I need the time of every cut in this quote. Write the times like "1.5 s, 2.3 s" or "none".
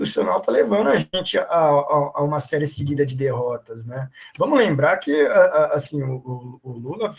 none